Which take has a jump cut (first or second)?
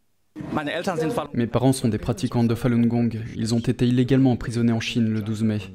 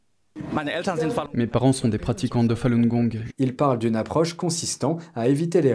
second